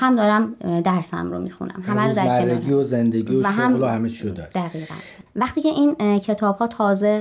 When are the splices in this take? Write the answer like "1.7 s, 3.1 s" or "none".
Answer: 5.3 s